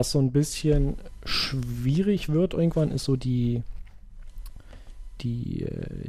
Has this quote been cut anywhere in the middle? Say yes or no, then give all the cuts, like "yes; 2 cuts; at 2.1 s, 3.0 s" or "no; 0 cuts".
no; 0 cuts